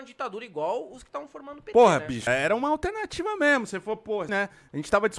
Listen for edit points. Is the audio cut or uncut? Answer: cut